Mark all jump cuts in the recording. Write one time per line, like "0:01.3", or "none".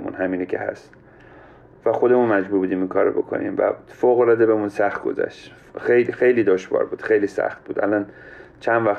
none